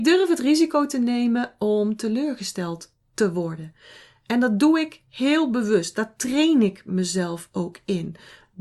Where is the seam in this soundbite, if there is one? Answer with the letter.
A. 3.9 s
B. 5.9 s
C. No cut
C